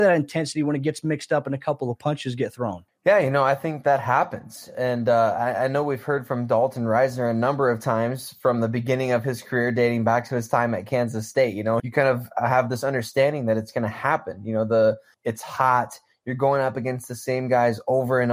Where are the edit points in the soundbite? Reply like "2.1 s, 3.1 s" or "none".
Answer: 11.8 s, 15.1 s